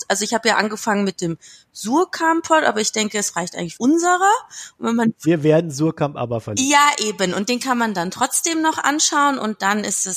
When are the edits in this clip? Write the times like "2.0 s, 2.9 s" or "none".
3.8 s